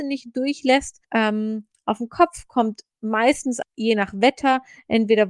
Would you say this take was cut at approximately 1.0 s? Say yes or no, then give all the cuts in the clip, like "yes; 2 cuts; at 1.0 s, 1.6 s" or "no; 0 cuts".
yes; 2 cuts; at 1.0 s, 3.6 s